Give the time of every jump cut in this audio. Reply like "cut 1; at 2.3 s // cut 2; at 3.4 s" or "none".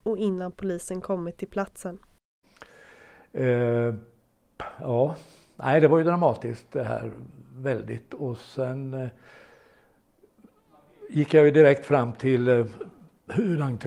none